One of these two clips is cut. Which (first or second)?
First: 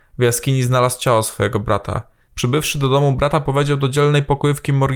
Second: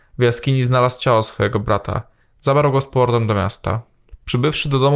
first